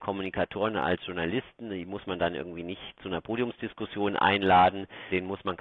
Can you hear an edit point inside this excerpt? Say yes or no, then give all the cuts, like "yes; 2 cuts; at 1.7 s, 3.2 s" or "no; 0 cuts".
no; 0 cuts